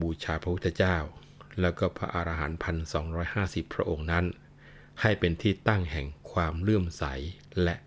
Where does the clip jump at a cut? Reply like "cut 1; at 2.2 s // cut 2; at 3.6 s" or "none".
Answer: none